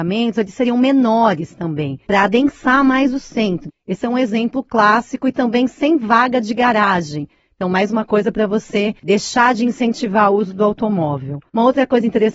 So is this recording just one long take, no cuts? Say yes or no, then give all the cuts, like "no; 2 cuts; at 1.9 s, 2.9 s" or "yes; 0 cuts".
yes; 0 cuts